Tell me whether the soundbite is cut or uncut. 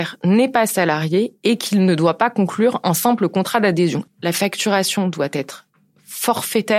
cut